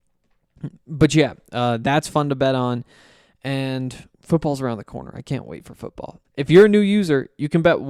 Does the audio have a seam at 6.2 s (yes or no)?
yes